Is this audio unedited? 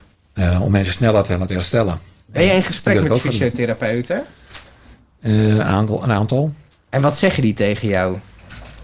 yes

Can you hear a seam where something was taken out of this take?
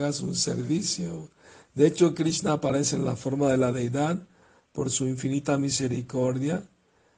no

